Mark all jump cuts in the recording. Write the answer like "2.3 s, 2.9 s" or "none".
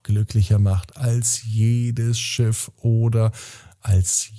none